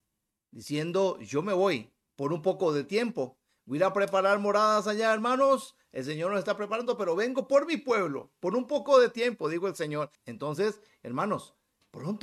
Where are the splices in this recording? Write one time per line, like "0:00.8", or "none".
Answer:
0:10.1